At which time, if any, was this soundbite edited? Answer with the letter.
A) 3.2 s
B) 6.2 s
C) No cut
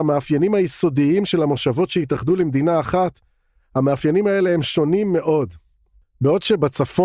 C